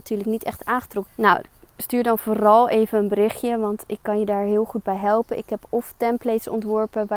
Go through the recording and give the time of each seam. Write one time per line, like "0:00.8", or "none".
0:01.1